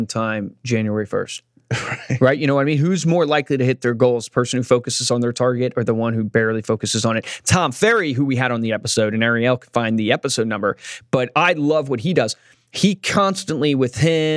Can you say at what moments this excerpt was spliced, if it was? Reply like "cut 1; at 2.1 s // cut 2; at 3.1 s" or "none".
none